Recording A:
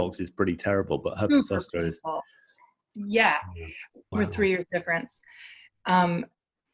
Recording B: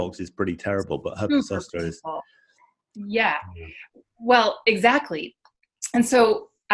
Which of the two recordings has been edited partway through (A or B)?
A